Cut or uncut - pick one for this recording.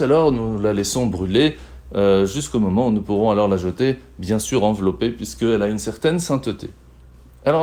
uncut